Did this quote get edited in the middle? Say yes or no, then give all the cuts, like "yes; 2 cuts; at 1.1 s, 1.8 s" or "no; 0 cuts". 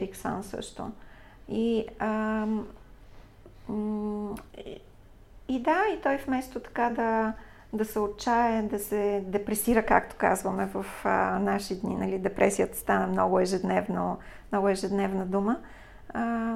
no; 0 cuts